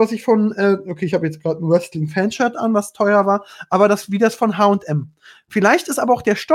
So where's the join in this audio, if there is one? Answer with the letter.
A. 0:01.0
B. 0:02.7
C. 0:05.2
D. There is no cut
D